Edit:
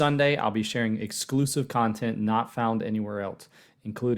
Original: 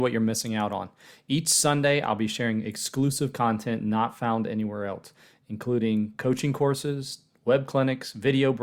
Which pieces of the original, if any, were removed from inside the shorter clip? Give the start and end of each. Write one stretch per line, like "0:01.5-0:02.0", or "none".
none